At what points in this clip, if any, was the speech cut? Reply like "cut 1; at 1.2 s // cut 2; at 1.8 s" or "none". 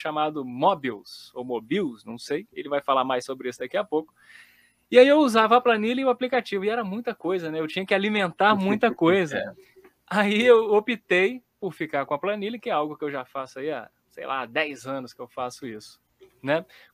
none